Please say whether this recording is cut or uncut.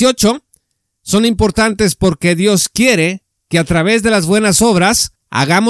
uncut